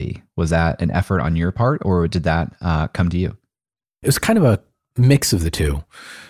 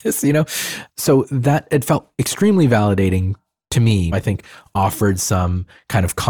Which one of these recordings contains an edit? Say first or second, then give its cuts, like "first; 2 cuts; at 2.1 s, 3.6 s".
second; 1 cut; at 4.1 s